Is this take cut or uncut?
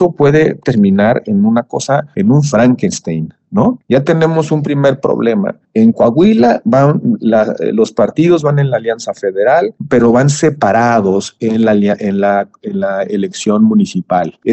uncut